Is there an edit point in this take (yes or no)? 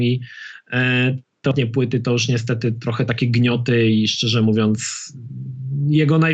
no